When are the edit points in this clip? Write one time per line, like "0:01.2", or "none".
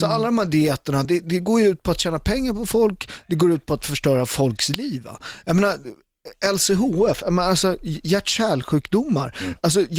none